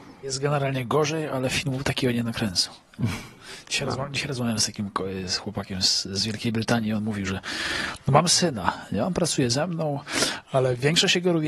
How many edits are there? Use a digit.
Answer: 0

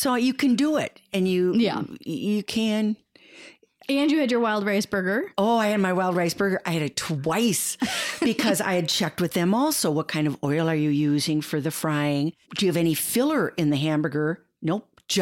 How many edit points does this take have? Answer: 1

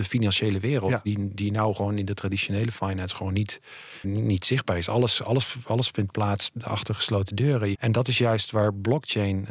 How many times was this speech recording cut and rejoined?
2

